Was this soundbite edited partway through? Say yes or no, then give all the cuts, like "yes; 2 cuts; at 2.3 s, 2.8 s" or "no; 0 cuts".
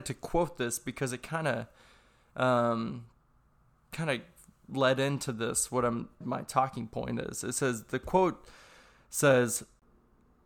yes; 1 cut; at 6.2 s